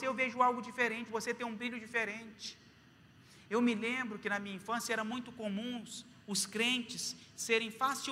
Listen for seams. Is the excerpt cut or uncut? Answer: cut